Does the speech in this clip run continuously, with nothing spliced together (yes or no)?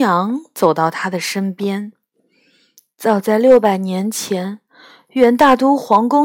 yes